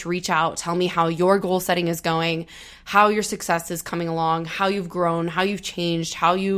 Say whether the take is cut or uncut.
uncut